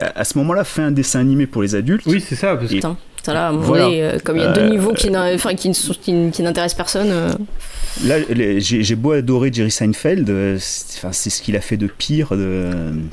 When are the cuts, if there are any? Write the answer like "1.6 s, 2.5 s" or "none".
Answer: 2.8 s